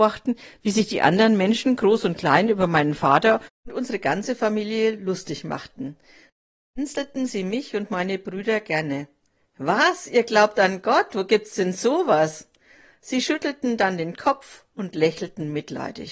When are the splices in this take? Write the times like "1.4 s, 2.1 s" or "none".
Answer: 3.5 s